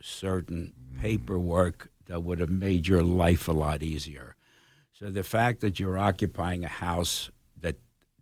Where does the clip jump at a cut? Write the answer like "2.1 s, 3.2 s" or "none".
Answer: none